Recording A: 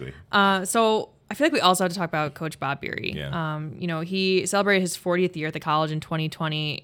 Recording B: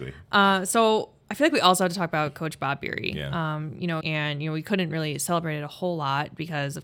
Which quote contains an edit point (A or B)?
B